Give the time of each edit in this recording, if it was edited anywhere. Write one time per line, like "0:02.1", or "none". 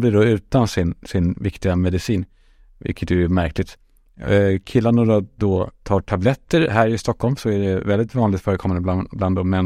none